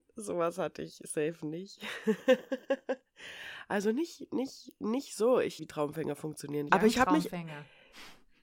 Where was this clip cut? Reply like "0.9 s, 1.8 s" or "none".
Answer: 5.6 s, 6.7 s